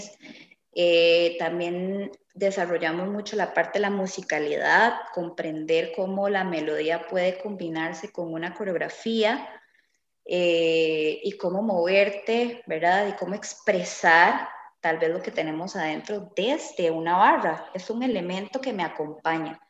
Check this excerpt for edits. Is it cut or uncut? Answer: uncut